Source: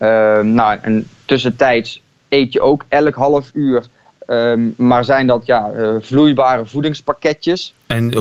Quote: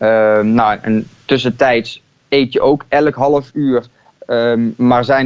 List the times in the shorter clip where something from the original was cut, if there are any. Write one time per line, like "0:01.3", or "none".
none